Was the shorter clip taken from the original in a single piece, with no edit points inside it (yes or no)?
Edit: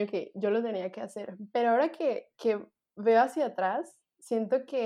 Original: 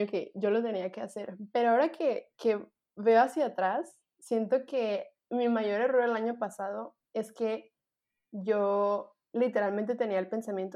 yes